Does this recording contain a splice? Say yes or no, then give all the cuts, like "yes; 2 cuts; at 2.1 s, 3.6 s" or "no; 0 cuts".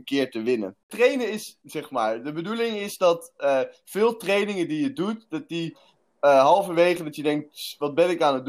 yes; 1 cut; at 1.6 s